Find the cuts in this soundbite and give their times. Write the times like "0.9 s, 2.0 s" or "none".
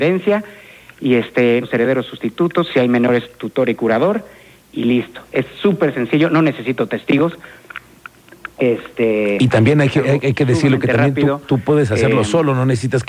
1.6 s